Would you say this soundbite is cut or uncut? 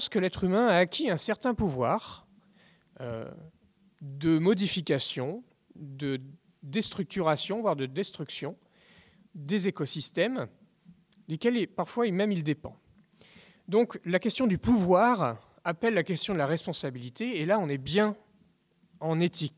uncut